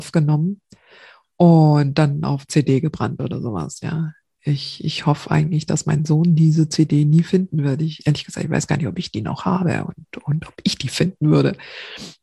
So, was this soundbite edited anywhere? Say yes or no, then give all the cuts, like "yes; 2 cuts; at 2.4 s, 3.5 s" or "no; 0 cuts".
no; 0 cuts